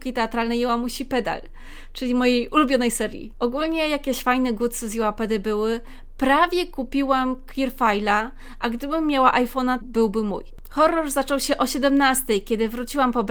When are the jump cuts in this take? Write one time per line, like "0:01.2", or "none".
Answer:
0:03.3
0:09.8